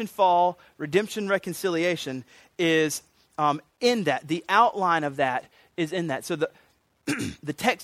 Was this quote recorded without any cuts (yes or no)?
yes